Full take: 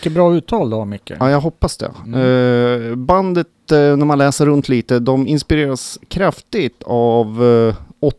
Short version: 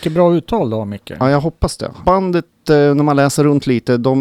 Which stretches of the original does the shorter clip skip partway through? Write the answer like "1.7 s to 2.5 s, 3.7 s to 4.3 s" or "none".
2.0 s to 3.1 s